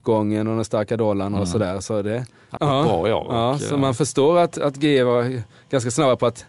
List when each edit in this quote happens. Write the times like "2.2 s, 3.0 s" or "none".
2.6 s